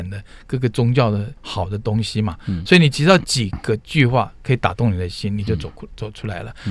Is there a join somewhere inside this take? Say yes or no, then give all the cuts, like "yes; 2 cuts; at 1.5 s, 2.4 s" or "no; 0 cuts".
yes; 1 cut; at 1.4 s